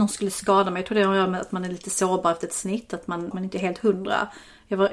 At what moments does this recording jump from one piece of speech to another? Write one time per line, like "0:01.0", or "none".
0:03.3